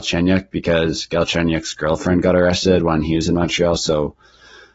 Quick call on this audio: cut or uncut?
uncut